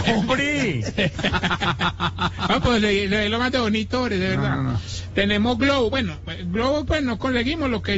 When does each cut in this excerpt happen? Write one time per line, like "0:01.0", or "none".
0:06.8